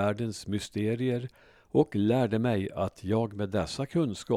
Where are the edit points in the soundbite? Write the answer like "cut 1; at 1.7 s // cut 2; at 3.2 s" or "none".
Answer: none